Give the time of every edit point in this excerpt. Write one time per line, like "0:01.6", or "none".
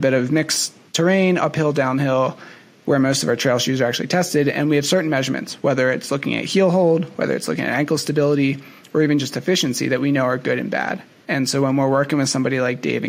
none

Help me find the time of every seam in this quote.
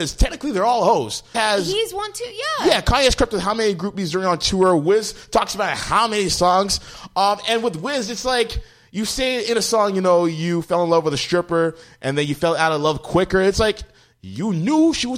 0:01.3

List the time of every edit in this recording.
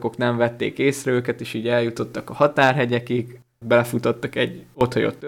0:03.6

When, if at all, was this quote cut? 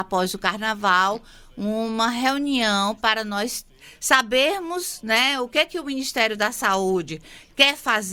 none

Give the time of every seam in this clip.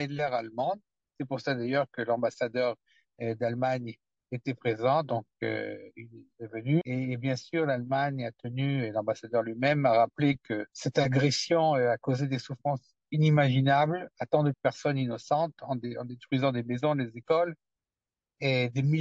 0:06.8
0:10.7
0:14.5

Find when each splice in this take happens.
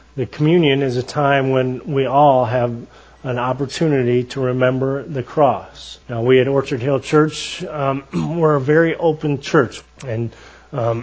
0:06.0
0:09.8

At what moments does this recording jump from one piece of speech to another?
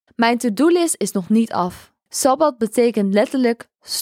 0:02.1

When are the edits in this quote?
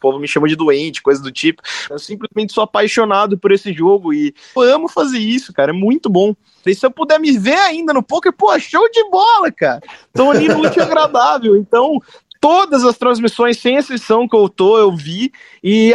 0:01.9
0:04.6
0:06.7

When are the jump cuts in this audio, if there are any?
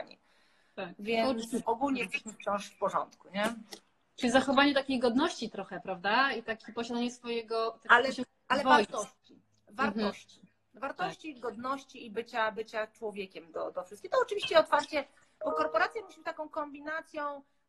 0:01.6

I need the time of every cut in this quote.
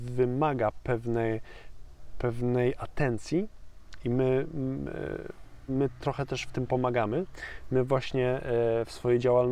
0:05.7

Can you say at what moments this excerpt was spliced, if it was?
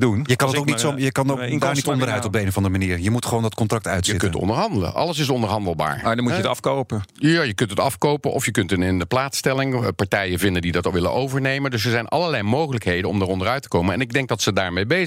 none

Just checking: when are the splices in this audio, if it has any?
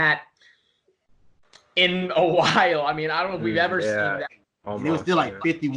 0:04.3

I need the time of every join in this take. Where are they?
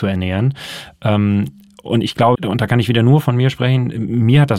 0:02.3

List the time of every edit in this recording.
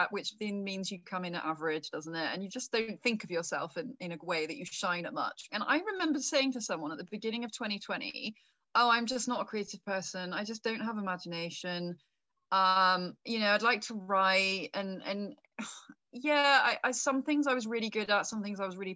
0:05.5

